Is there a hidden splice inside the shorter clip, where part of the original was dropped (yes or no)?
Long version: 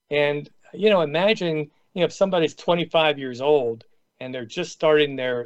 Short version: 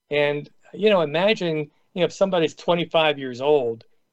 no